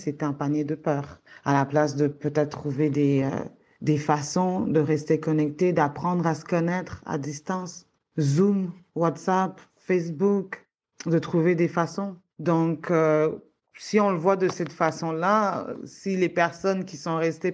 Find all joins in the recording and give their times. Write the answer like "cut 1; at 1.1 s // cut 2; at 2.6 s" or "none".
none